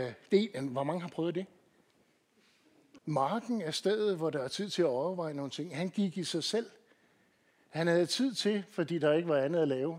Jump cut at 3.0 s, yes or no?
yes